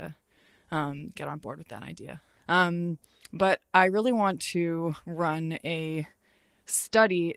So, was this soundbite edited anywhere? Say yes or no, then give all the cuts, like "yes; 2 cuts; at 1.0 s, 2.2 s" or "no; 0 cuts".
yes; 1 cut; at 2.4 s